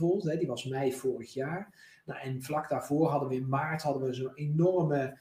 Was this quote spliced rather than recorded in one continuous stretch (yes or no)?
no